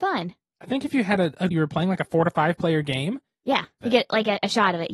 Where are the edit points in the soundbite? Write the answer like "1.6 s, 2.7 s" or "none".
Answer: 1.5 s, 3.8 s